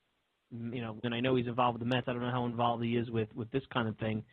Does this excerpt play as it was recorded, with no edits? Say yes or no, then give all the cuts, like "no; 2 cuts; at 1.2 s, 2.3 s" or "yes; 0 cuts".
no; 1 cut; at 1.0 s